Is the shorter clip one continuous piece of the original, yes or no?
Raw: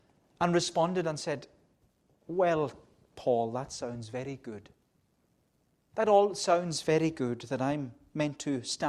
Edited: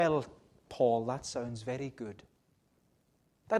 yes